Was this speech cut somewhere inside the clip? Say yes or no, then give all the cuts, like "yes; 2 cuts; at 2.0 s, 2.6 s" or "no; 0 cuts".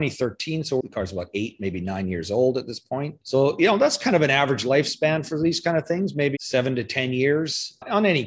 yes; 1 cut; at 6.3 s